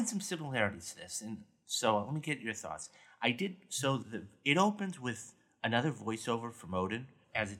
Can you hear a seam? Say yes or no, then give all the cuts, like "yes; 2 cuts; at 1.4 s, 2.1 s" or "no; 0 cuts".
no; 0 cuts